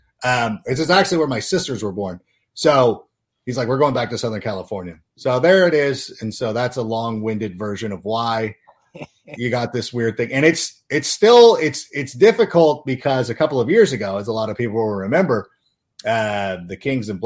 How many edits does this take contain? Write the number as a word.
zero